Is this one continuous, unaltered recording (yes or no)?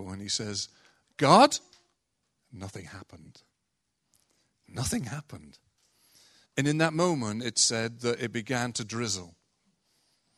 no